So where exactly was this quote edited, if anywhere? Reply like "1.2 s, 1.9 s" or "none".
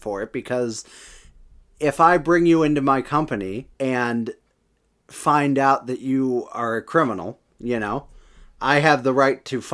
3.7 s